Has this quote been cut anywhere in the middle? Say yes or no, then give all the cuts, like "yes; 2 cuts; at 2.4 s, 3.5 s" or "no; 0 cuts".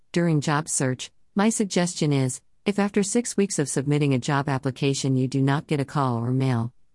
no; 0 cuts